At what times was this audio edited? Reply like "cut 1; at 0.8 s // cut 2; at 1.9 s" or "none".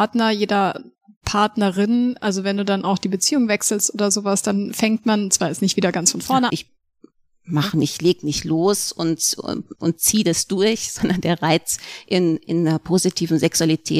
cut 1; at 6.5 s

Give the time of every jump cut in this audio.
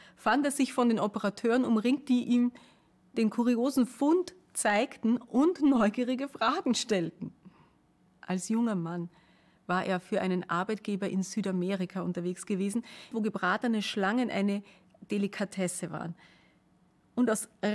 cut 1; at 8.1 s // cut 2; at 13.1 s

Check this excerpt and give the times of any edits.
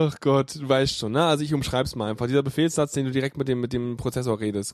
none

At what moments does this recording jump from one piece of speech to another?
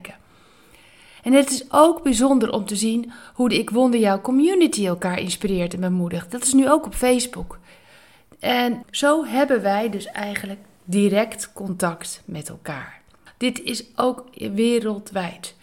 cut 1; at 8.8 s // cut 2; at 13.3 s

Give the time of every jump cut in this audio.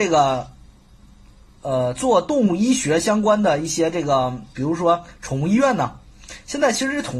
none

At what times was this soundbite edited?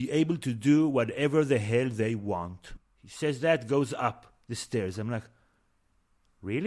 cut 1; at 2.8 s

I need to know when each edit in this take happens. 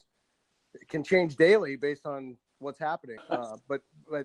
cut 1; at 3.2 s

